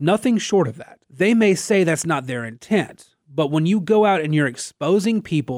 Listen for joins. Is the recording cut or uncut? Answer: cut